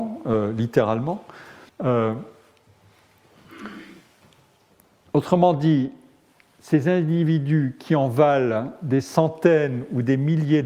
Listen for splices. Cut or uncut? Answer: cut